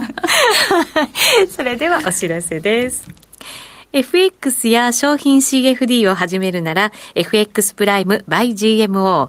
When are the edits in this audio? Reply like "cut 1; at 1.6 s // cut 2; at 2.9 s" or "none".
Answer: none